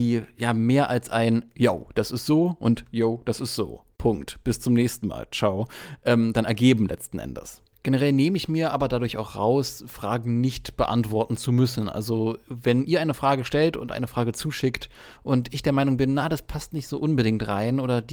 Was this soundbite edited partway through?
no; 0 cuts

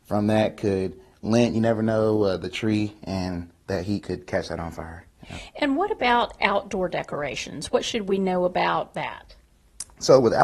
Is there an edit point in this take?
no; 0 cuts

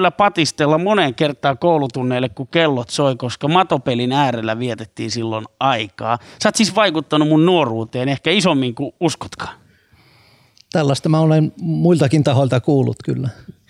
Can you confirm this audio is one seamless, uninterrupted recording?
yes; 0 cuts

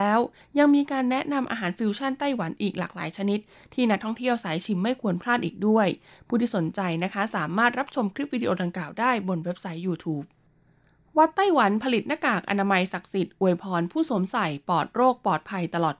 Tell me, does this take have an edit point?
no; 0 cuts

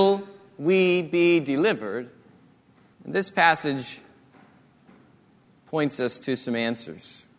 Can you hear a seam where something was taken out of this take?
yes; 1 cut; at 2.9 s

